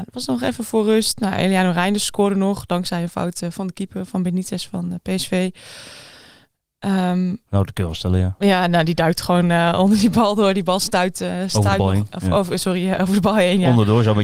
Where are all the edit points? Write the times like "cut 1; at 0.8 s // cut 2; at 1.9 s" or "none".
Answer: none

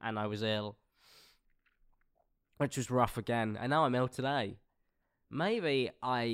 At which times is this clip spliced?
none

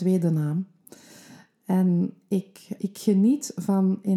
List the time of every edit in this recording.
cut 1; at 2.8 s

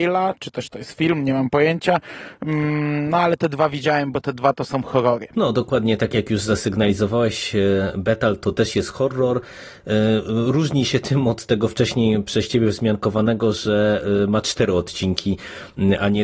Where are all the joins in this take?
none

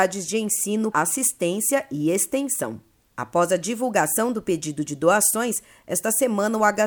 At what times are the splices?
cut 1; at 0.9 s

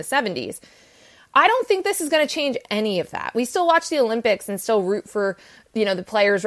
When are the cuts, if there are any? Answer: none

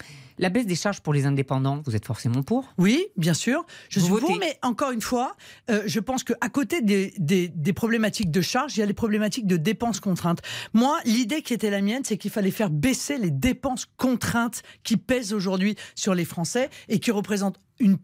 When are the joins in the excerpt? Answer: none

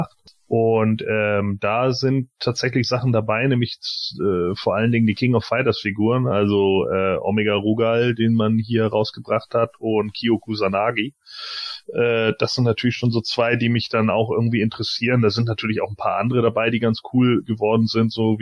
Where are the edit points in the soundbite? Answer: none

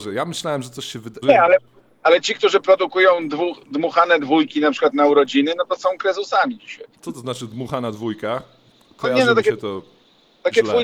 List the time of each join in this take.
cut 1; at 1.2 s

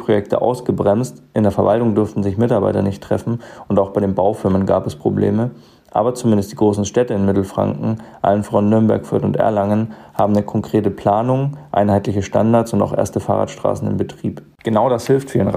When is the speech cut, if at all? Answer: none

